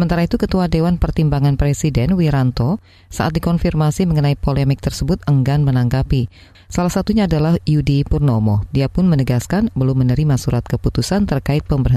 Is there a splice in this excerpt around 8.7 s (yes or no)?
yes